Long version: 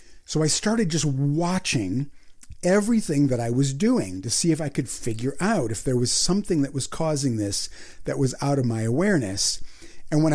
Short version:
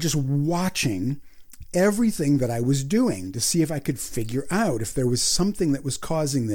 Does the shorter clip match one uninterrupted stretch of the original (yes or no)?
yes